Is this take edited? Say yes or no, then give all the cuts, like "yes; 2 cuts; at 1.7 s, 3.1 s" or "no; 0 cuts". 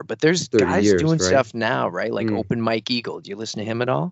no; 0 cuts